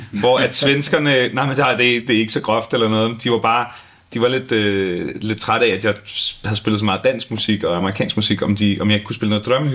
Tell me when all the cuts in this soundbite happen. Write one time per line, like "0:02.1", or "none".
none